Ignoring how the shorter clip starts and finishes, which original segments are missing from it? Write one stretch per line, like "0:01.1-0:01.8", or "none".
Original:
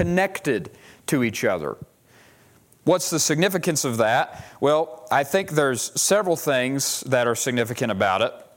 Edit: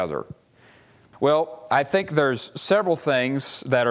0:02.6-0:04.5